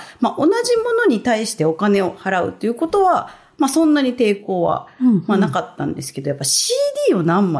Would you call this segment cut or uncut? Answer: uncut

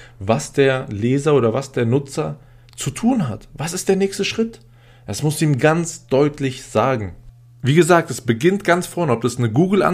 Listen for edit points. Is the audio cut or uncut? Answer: uncut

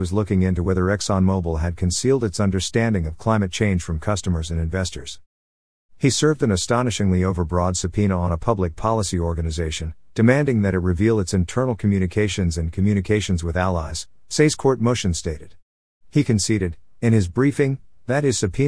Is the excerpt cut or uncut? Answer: uncut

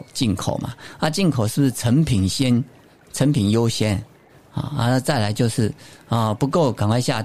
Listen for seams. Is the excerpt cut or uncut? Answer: uncut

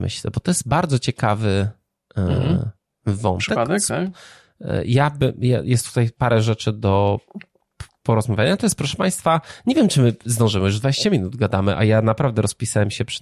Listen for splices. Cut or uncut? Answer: uncut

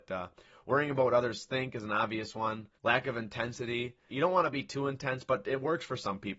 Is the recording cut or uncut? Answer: cut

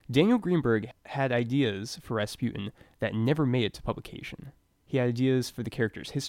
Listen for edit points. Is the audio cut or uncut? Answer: uncut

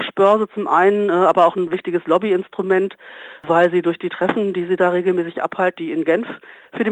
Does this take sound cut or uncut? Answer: cut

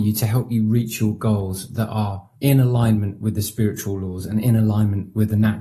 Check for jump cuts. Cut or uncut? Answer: cut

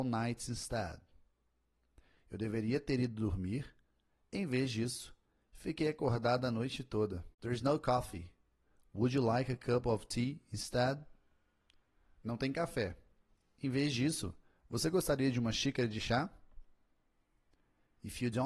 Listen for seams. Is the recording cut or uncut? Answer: cut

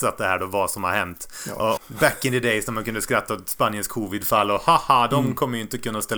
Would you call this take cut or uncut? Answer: cut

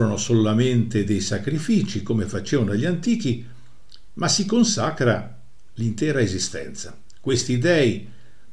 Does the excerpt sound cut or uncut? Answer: uncut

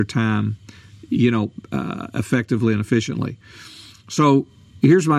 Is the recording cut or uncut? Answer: uncut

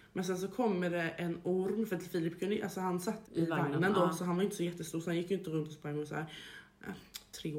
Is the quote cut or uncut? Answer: cut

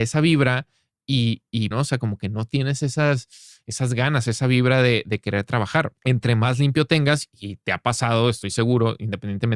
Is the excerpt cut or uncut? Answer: cut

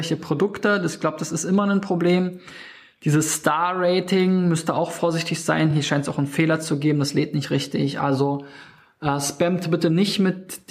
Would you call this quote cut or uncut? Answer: uncut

